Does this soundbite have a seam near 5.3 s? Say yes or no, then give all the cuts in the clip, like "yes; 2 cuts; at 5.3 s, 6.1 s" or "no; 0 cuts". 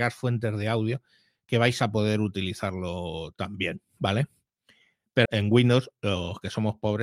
yes; 1 cut; at 5.3 s